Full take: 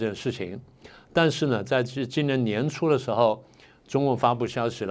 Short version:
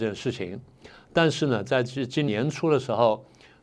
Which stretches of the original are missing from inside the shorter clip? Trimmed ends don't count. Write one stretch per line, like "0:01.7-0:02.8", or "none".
0:02.3-0:02.5